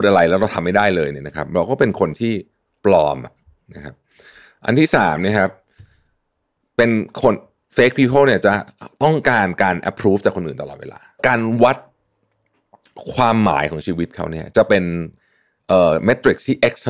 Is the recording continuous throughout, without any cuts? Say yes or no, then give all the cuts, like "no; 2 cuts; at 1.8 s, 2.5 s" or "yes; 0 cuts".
yes; 0 cuts